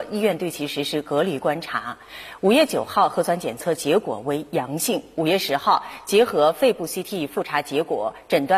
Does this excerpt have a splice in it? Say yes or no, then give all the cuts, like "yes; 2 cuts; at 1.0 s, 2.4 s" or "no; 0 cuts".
no; 0 cuts